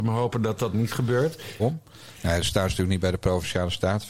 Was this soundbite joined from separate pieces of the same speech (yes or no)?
yes